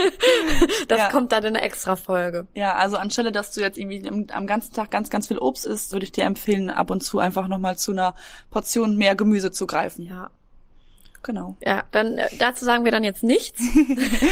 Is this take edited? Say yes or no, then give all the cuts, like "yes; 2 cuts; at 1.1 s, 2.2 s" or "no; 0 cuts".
yes; 2 cuts; at 5.9 s, 11.6 s